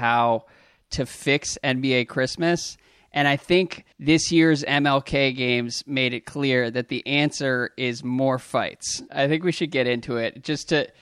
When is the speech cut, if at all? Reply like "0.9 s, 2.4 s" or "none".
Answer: 3.9 s, 9.1 s